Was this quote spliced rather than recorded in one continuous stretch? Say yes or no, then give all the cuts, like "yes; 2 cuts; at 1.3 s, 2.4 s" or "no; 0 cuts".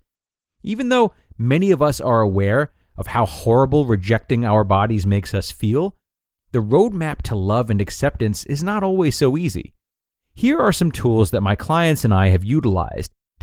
no; 0 cuts